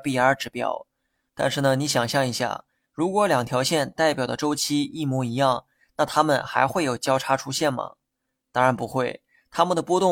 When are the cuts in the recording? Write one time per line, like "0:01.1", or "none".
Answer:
0:01.3